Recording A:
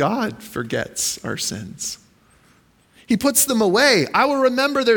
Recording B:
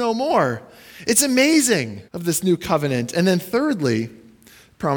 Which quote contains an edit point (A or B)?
B